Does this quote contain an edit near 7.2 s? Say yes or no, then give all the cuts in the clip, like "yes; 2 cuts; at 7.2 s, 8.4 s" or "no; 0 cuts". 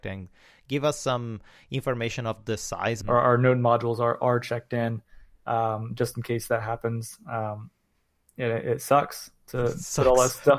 no; 1 cut; at 3.0 s